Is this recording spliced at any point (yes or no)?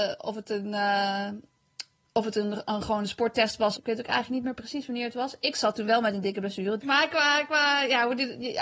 yes